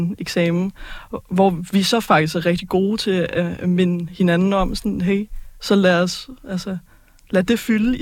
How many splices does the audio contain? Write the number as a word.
one